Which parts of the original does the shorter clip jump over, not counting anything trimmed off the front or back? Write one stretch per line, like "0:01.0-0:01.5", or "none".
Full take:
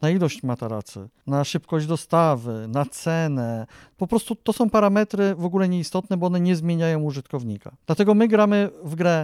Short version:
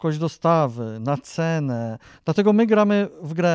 0:03.8-0:07.8